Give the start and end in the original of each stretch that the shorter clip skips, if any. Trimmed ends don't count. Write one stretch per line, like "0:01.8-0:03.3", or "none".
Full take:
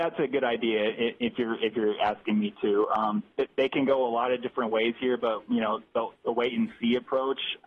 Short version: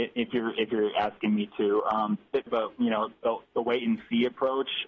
0:03.5-0:05.2